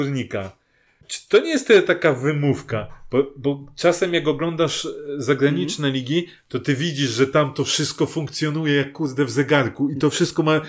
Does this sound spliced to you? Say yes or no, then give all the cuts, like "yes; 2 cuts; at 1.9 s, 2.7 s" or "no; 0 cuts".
yes; 1 cut; at 1.0 s